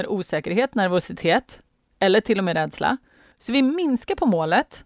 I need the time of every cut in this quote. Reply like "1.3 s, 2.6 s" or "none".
3.3 s